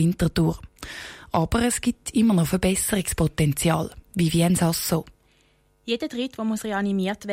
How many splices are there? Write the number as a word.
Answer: one